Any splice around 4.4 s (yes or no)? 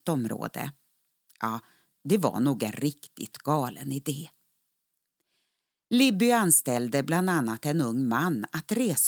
no